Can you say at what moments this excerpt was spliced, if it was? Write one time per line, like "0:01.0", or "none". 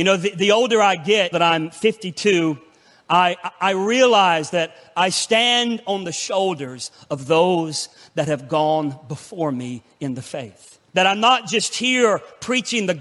0:01.3
0:10.9